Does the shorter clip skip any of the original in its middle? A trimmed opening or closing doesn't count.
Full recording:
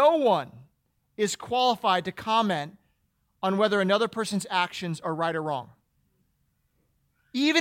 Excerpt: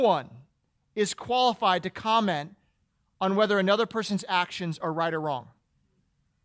no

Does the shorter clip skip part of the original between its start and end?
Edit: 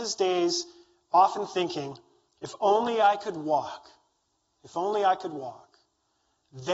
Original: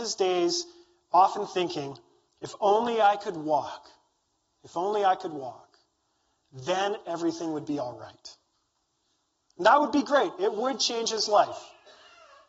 no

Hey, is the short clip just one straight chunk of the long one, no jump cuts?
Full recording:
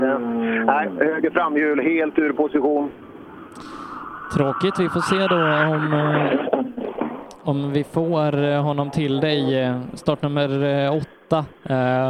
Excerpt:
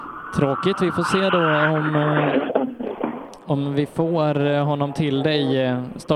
yes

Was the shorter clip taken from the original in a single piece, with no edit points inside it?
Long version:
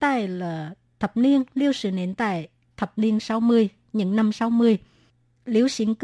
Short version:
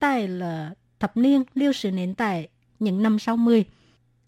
no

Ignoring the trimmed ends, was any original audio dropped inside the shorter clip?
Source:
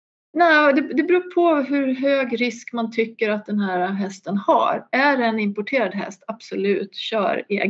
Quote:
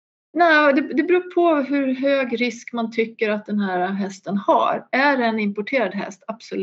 no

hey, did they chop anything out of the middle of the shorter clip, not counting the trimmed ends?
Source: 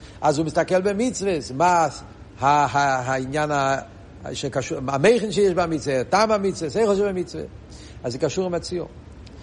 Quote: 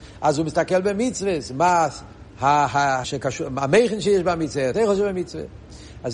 yes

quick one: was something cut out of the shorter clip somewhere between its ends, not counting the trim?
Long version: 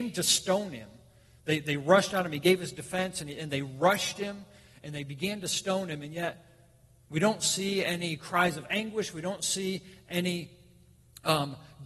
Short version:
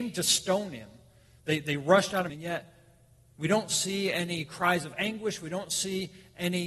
yes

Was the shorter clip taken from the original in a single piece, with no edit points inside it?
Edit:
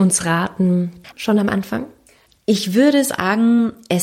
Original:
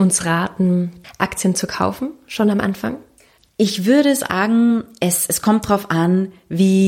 no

